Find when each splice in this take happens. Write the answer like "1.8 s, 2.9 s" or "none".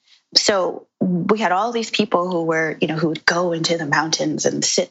0.9 s